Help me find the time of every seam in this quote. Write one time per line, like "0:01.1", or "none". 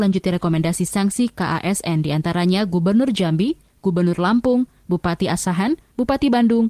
none